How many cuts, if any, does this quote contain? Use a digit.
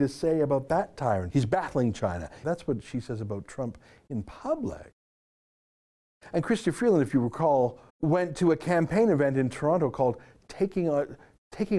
3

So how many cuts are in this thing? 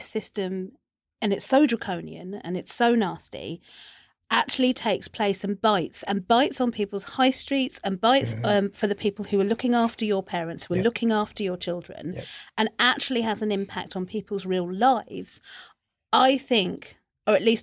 0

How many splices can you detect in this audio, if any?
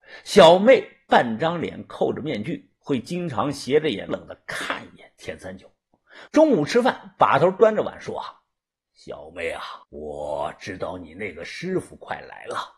3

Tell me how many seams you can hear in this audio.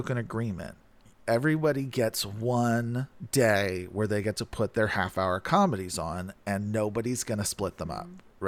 0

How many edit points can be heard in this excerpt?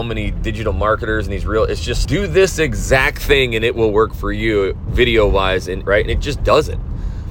2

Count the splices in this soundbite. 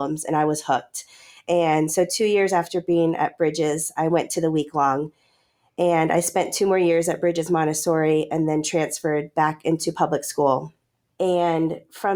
0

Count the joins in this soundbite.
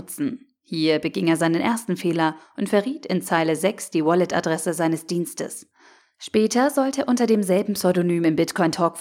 0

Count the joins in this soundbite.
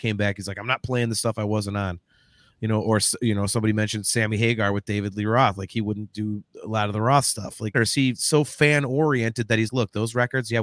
2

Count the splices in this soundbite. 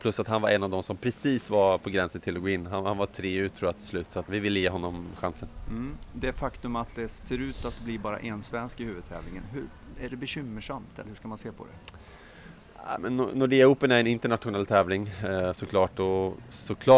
1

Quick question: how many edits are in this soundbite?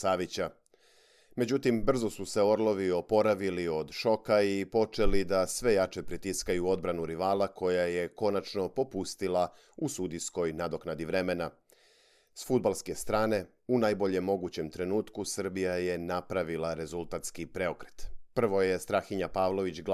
0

